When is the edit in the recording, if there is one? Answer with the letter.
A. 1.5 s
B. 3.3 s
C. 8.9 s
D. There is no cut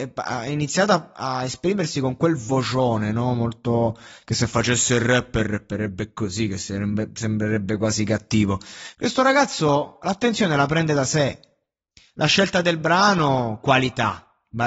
C